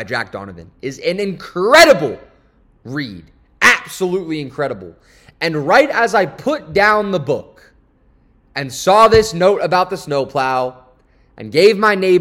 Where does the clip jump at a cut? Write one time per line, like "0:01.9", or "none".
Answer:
none